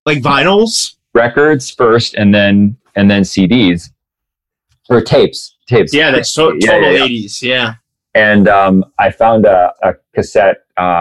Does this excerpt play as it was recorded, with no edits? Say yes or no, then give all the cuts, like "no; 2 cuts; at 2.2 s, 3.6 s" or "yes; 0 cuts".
no; 2 cuts; at 5.9 s, 9.8 s